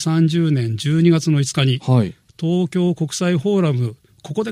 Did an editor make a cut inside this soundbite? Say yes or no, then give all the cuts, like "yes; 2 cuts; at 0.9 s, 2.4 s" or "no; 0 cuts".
no; 0 cuts